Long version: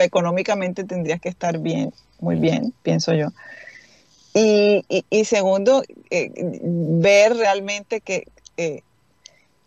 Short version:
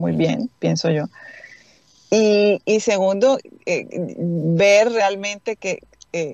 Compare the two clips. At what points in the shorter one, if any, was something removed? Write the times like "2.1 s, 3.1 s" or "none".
2.6 s